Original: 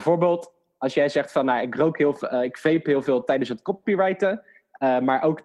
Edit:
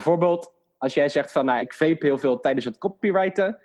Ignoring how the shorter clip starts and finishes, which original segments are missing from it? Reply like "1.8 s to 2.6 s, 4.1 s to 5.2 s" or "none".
1.6 s to 2.4 s